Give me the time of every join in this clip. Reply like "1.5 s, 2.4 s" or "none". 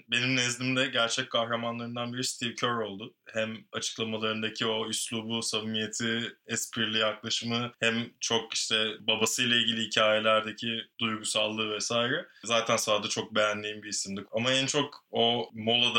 14.2 s